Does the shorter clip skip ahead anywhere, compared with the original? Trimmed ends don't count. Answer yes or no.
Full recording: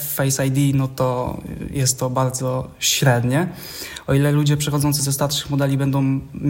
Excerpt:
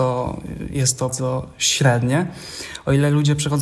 yes